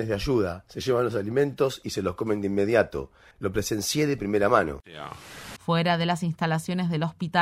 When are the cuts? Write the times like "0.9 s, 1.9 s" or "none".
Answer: 3.3 s, 5.6 s